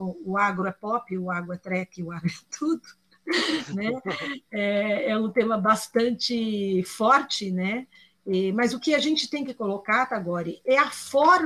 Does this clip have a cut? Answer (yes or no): no